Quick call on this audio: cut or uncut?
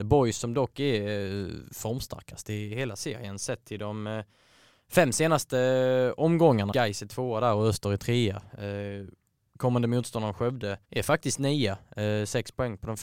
cut